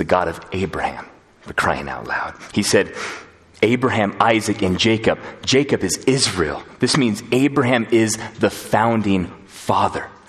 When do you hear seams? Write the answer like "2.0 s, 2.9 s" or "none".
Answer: none